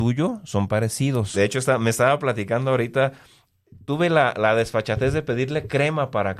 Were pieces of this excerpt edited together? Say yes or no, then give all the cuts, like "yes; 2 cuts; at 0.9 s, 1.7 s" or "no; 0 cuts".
yes; 1 cut; at 1.3 s